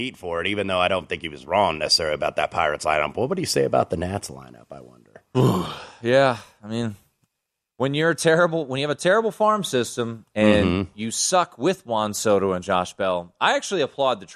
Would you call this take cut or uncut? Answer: uncut